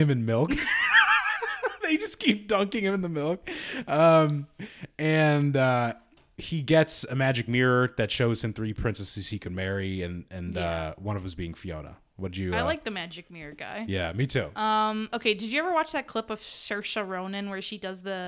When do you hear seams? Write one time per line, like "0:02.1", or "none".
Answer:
none